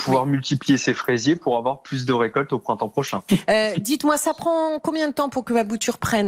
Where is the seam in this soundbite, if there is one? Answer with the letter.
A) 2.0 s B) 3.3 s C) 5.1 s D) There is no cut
B